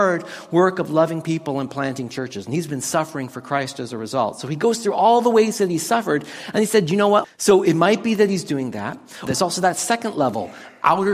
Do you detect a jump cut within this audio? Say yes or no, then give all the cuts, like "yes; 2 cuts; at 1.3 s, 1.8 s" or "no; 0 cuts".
yes; 2 cuts; at 7.2 s, 9.3 s